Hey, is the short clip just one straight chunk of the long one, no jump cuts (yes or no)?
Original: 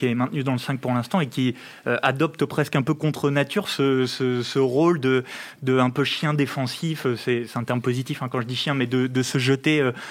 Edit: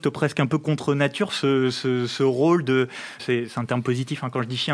no